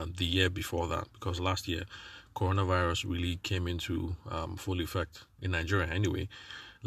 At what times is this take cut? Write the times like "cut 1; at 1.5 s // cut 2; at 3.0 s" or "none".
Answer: none